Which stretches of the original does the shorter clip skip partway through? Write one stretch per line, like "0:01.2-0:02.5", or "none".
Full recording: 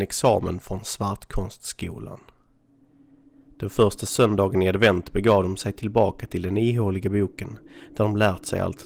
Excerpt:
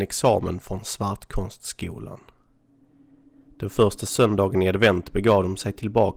none